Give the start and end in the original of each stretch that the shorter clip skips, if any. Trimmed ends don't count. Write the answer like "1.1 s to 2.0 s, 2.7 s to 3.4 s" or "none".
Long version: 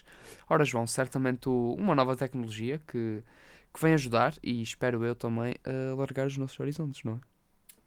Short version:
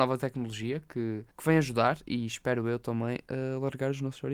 3.3 s to 3.7 s

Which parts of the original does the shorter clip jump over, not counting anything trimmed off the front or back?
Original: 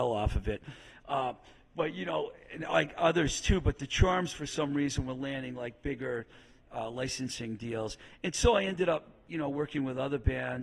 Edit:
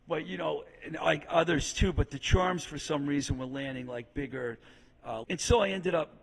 6.9 s to 8.2 s

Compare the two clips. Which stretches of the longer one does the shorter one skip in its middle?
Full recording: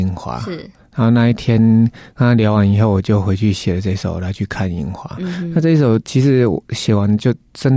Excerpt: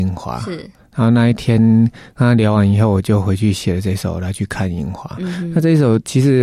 none

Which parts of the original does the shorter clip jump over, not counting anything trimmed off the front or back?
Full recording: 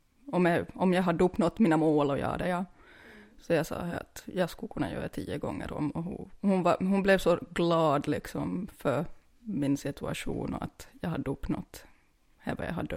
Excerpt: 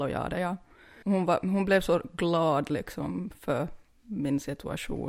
3.1 s to 6.4 s

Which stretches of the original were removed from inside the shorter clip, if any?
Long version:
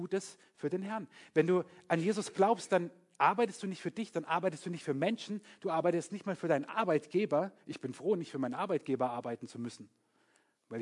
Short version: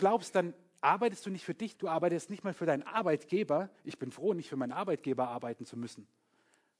4.1 s to 5.6 s

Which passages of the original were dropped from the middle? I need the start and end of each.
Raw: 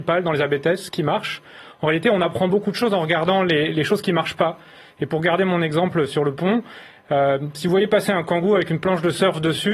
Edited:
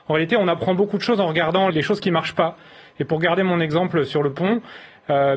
3.4 s to 3.7 s

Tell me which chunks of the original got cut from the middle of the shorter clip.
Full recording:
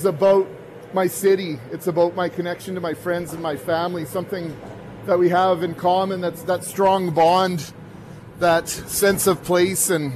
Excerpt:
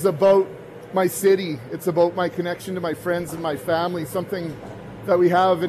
none

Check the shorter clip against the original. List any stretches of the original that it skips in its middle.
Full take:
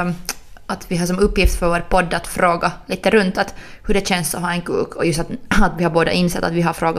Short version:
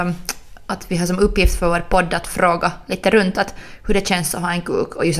none

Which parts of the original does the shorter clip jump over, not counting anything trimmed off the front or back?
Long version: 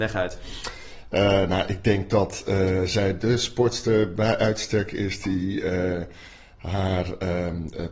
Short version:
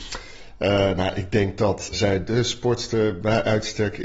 2.4 s to 2.9 s

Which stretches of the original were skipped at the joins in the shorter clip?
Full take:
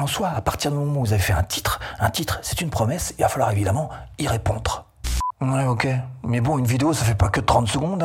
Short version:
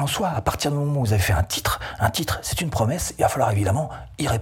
none

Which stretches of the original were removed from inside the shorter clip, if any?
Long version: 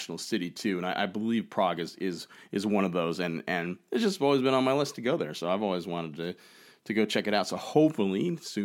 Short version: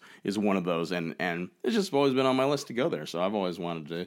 none

